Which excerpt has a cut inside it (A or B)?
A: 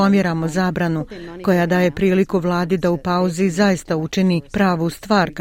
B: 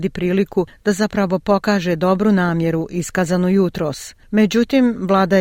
B